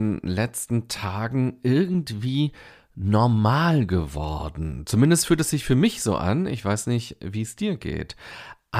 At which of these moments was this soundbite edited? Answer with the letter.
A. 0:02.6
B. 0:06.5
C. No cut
C